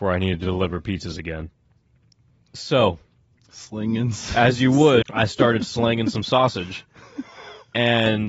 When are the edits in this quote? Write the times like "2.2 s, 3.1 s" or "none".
5.0 s